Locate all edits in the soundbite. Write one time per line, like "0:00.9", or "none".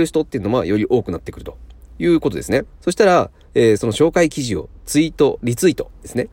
0:02.7
0:03.8